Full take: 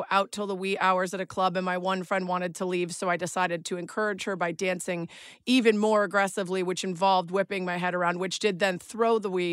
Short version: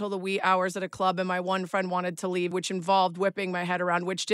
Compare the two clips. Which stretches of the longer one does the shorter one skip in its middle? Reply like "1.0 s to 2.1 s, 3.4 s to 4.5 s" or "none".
2.9 s to 6.6 s